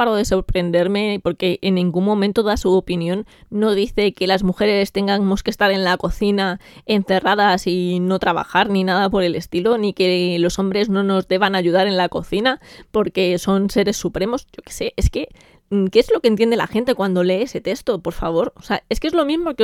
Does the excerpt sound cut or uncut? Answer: uncut